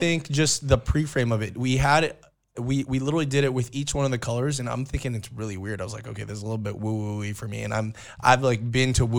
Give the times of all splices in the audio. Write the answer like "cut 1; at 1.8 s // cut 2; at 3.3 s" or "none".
cut 1; at 2.5 s